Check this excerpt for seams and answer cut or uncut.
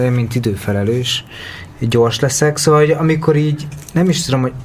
cut